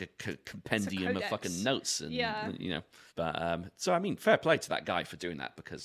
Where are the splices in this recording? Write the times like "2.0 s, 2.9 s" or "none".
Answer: 3.1 s